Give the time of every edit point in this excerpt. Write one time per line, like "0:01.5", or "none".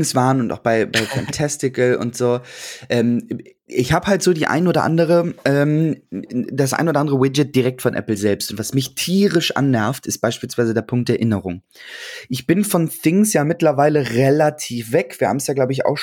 none